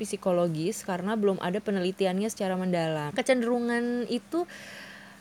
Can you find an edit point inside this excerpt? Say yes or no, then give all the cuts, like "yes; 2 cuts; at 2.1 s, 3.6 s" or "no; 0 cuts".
yes; 1 cut; at 3.1 s